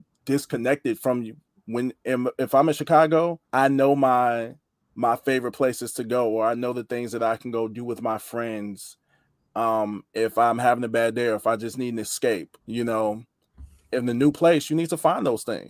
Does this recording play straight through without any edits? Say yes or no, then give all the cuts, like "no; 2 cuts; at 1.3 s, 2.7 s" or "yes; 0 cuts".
no; 2 cuts; at 3.4 s, 12.6 s